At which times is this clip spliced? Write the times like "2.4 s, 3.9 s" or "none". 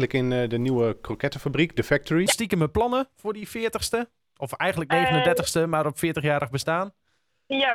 2.3 s

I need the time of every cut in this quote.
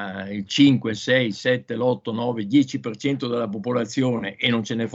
none

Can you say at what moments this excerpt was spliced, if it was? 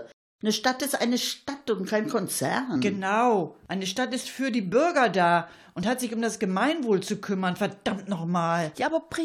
none

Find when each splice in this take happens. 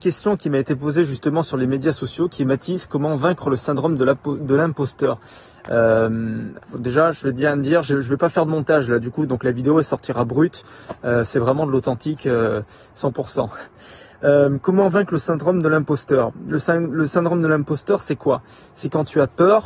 6.6 s

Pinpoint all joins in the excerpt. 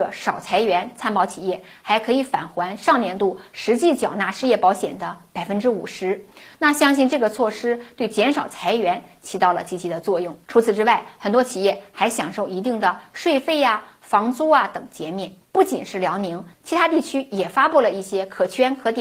10.4 s

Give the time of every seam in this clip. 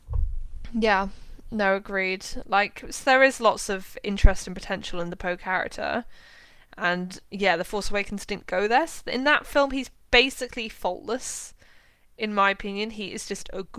none

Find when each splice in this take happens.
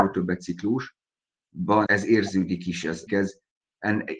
1.9 s, 3.1 s

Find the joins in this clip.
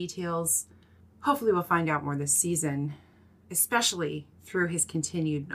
4.3 s

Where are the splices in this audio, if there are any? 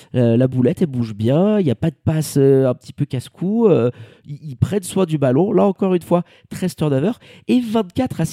none

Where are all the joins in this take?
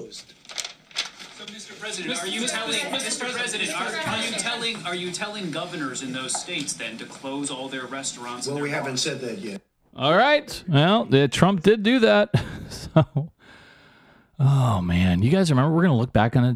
none

